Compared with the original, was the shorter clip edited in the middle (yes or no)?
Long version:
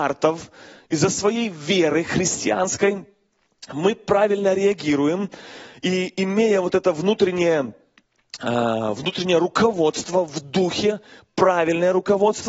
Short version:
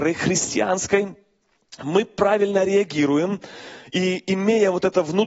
no